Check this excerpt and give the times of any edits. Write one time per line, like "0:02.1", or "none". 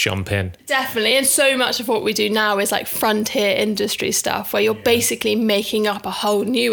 none